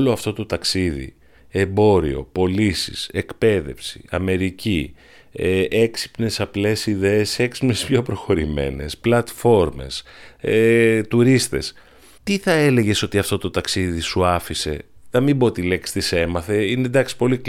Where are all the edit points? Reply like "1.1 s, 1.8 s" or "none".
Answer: 12.2 s